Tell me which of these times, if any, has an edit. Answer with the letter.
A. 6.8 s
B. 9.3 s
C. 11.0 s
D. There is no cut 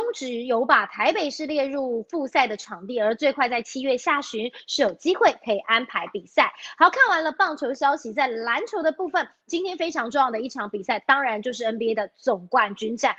D